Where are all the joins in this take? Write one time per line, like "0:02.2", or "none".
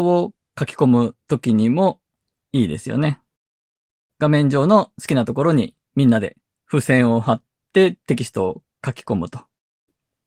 0:04.1
0:08.0